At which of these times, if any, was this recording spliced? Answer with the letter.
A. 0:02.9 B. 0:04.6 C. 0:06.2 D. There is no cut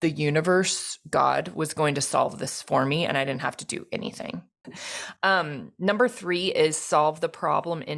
B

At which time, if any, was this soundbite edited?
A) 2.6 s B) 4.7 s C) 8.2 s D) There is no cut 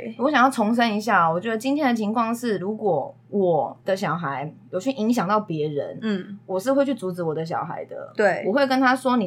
D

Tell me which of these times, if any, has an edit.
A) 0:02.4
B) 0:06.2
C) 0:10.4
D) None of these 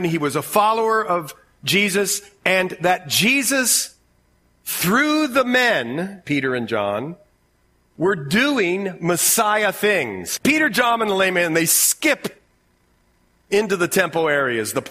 C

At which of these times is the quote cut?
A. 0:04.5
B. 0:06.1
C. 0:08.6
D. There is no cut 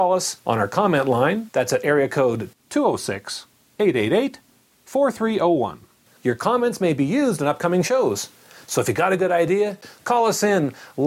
B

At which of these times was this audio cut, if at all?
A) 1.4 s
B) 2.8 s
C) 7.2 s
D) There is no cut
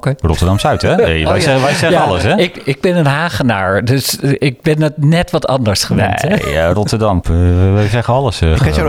C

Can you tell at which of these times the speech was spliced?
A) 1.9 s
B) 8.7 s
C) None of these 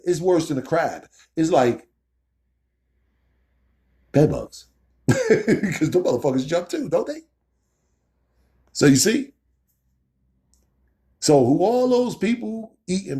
C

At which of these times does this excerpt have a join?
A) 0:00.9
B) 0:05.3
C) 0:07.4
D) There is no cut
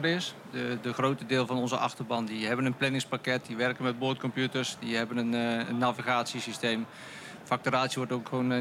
D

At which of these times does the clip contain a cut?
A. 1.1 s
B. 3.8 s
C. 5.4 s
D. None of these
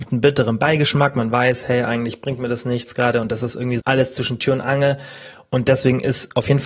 B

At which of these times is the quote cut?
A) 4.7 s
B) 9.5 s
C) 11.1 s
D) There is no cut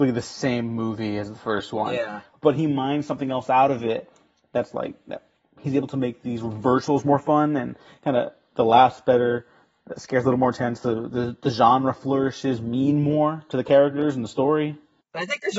D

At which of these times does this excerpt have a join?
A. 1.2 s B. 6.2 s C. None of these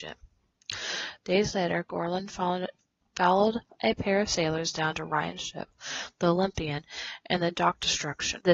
A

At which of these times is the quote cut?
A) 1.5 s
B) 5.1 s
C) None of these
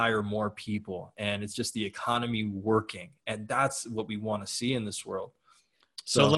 C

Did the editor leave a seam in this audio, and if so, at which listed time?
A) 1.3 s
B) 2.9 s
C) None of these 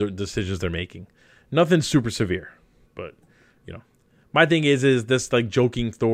B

